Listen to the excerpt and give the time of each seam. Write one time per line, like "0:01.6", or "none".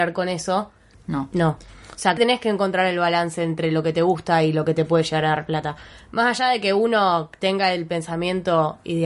0:00.9
0:02.2